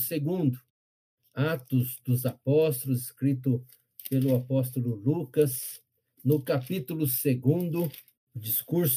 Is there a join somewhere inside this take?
no; 0 cuts

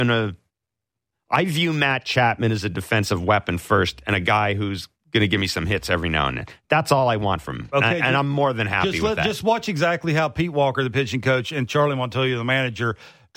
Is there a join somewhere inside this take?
no; 0 cuts

